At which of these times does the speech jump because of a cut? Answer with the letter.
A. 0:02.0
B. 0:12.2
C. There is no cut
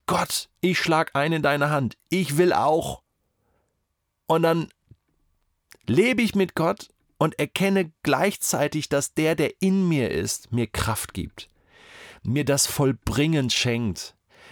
C